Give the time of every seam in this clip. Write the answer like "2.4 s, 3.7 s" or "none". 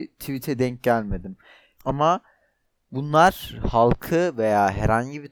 1.8 s